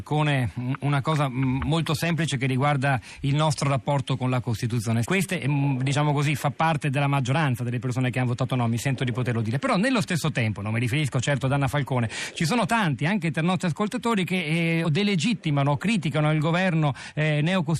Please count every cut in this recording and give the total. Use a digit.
2